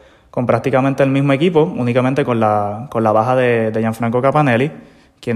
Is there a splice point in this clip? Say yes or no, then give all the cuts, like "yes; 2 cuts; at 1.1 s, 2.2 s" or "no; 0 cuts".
no; 0 cuts